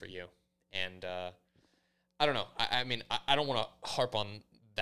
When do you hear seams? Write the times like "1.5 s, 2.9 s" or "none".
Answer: none

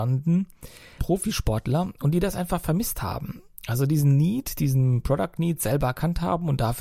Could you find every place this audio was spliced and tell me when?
1.0 s

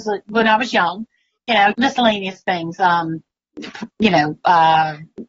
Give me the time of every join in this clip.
1.7 s

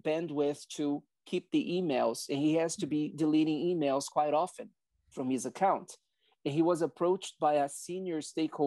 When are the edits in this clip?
none

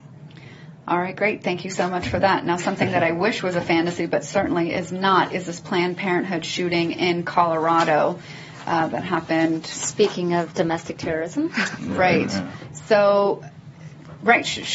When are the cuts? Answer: none

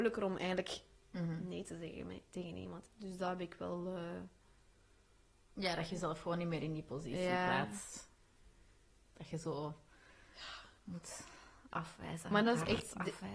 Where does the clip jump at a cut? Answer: 2.9 s

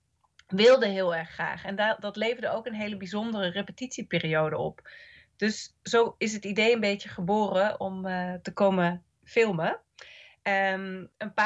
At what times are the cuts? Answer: 7.8 s

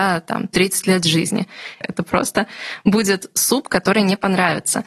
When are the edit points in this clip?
1.8 s

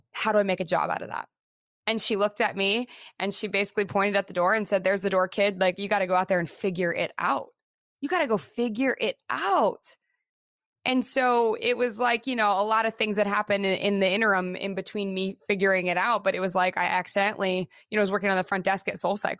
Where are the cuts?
none

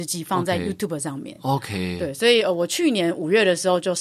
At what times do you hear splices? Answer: none

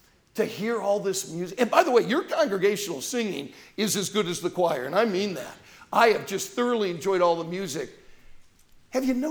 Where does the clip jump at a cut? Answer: none

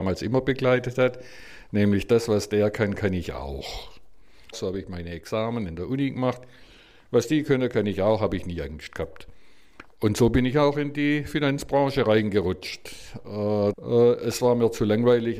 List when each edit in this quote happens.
4.5 s, 13.7 s

